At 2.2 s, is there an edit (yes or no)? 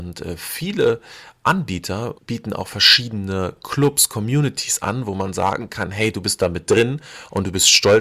yes